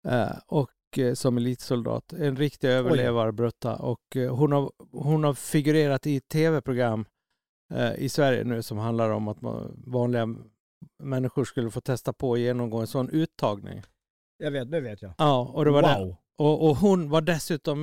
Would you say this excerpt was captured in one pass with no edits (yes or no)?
yes